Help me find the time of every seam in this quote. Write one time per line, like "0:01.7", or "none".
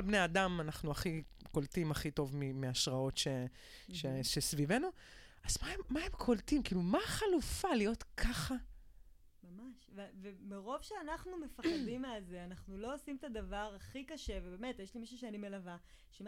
none